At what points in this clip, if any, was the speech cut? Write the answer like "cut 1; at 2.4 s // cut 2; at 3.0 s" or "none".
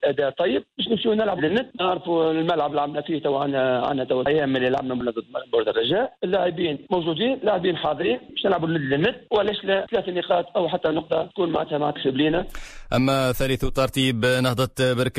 cut 1; at 1.4 s